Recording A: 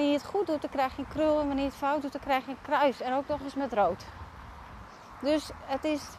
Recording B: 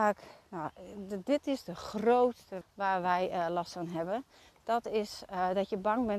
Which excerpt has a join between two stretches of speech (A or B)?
B